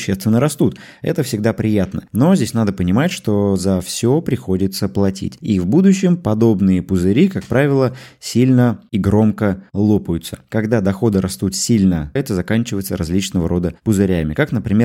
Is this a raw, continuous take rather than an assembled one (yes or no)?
no